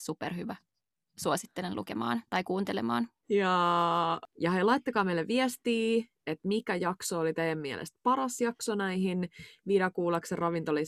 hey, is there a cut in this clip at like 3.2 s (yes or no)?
yes